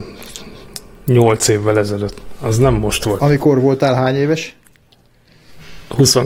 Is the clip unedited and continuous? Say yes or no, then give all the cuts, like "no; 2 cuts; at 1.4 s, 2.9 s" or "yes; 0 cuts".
yes; 0 cuts